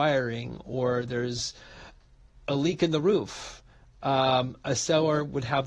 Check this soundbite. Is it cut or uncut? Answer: uncut